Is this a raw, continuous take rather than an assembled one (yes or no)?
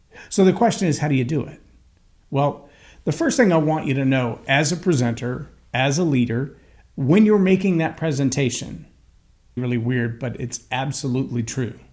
no